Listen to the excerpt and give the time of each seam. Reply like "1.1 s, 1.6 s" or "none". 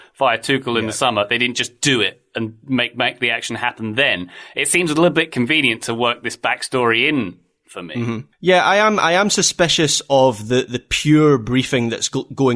8.3 s